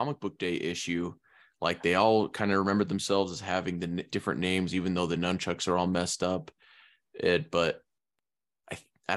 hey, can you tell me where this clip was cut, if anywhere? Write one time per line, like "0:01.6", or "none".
0:04.1